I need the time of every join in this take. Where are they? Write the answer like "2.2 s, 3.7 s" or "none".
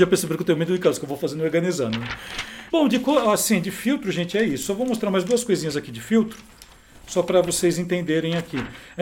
2.7 s